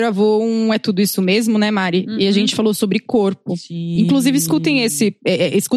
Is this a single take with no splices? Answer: yes; 0 cuts

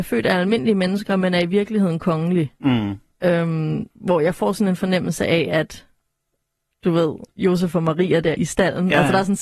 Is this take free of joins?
no; 2 cuts; at 3.9 s, 8.3 s

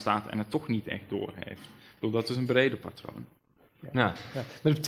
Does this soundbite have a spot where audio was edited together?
no; 0 cuts

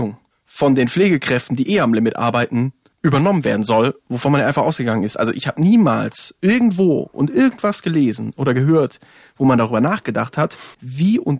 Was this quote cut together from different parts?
no; 0 cuts

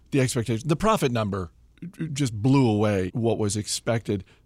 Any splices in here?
yes; 1 cut; at 3.1 s

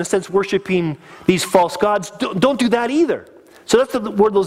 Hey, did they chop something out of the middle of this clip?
no; 0 cuts

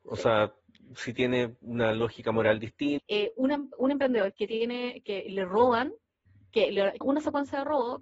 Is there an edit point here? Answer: yes; 2 cuts; at 3.0 s, 7.0 s

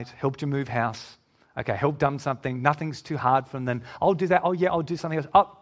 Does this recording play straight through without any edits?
yes; 0 cuts

